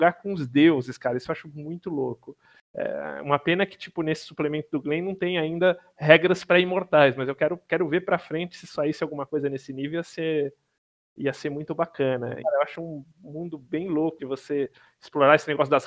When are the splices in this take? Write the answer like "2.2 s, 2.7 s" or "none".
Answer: 12.4 s, 14.2 s